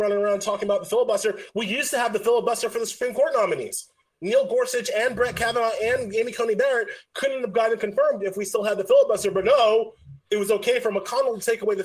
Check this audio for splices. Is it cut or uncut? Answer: uncut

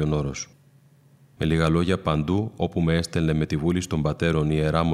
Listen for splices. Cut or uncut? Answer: cut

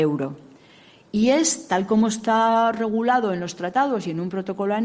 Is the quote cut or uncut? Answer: uncut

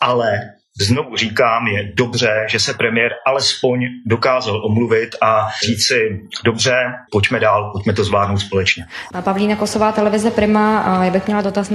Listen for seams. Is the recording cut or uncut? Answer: cut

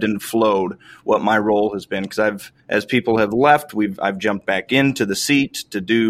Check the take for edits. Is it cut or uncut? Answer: cut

